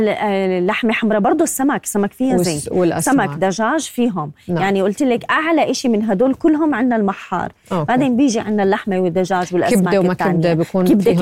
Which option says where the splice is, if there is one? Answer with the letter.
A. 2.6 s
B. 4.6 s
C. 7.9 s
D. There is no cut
D